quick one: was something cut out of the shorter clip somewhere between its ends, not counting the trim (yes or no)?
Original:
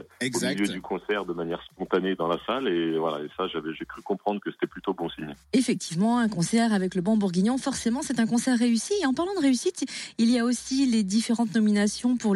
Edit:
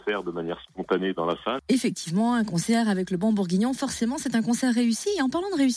yes